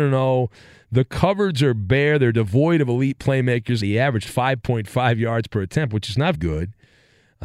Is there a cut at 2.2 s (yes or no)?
no